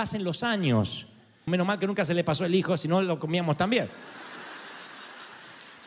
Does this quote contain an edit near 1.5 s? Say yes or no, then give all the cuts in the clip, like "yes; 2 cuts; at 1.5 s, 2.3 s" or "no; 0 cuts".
yes; 1 cut; at 1.5 s